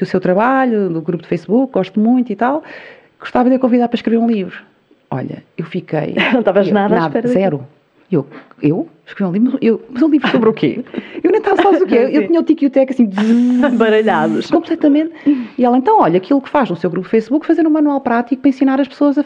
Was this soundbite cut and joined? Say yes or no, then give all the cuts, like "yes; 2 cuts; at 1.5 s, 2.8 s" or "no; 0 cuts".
no; 0 cuts